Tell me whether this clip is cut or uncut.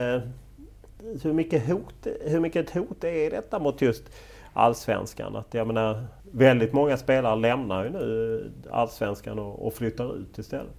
cut